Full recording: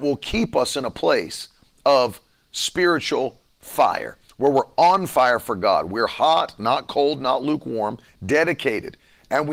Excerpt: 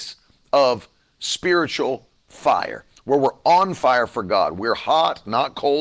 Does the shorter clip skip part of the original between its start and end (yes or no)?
no